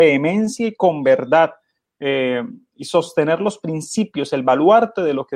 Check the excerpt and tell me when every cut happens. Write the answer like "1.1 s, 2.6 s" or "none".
none

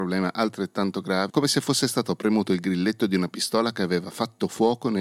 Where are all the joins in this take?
1.3 s

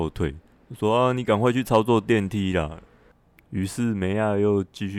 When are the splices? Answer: 2.9 s

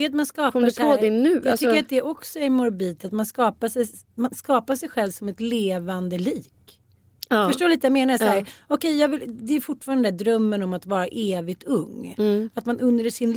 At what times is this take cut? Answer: none

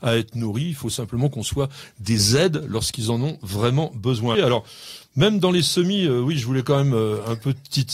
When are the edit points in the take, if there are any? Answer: 4.3 s

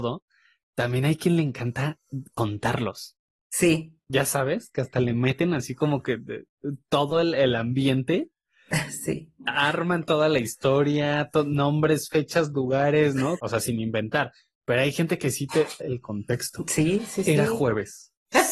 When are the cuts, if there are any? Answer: 13.4 s, 15.8 s

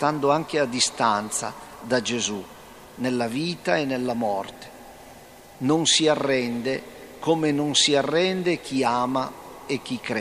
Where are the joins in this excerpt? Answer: none

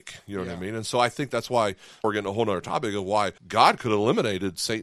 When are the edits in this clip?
2.0 s, 3.4 s

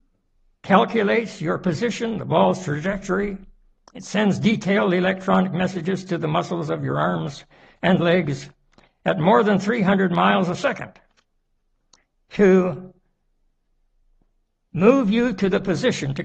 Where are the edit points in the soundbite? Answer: none

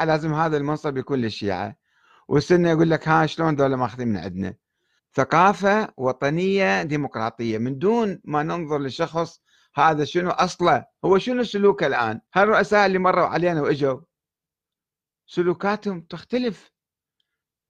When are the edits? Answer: 5.0 s, 12.3 s

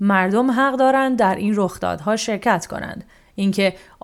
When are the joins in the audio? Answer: none

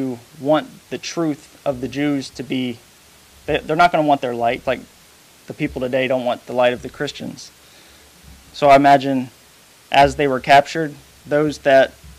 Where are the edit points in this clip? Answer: 4.6 s

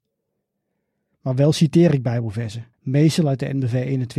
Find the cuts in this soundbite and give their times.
2.7 s

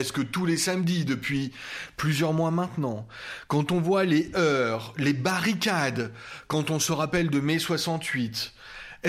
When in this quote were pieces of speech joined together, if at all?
none

